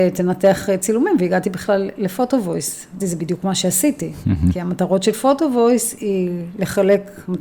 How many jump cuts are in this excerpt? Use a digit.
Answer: 1